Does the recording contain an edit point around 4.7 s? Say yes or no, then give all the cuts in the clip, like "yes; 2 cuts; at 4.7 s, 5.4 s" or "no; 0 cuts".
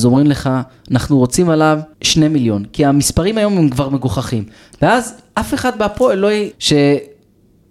no; 2 cuts; at 1.9 s, 6.5 s